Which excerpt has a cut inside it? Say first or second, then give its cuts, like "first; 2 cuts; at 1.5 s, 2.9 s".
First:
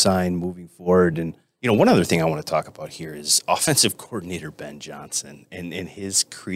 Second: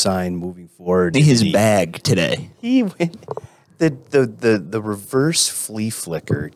second; 1 cut; at 1.1 s